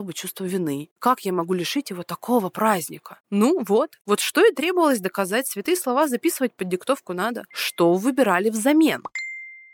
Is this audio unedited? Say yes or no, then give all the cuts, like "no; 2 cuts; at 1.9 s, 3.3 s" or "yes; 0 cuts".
no; 1 cut; at 7.5 s